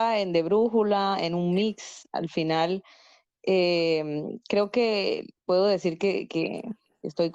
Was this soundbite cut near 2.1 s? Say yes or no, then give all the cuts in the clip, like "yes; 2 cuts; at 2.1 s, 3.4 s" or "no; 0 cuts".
no; 1 cut; at 5.4 s